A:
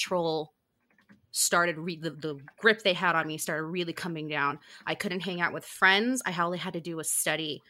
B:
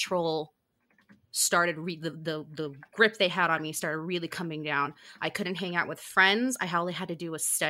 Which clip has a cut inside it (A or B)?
A